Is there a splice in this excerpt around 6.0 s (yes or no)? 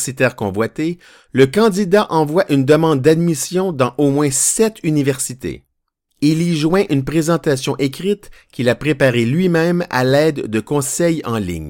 no